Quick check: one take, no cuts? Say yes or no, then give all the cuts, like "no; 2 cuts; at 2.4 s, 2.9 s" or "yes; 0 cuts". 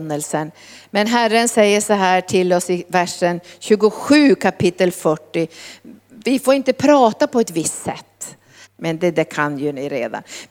no; 1 cut; at 8.6 s